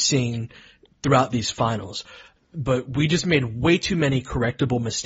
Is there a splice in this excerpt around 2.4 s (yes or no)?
yes